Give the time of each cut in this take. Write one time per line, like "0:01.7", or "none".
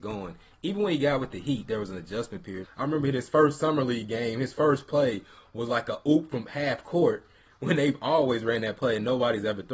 0:02.6